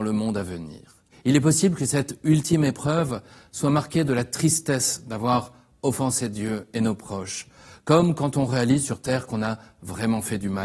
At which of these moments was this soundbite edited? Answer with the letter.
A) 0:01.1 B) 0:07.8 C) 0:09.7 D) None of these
A